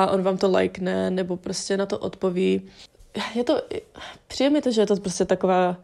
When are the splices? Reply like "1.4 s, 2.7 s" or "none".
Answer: none